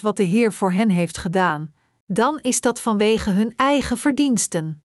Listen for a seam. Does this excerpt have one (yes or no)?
yes